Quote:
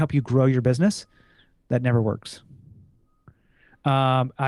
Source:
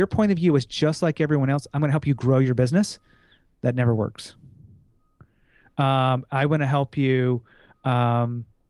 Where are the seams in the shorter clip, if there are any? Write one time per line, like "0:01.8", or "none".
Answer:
none